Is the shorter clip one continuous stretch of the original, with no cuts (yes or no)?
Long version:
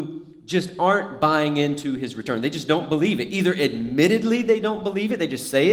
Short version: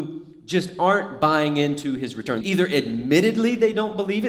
no